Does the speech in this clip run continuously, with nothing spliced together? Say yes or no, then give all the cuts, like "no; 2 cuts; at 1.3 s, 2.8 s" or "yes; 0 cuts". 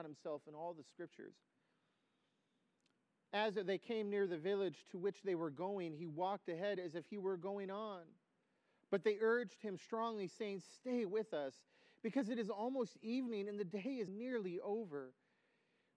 no; 1 cut; at 14.1 s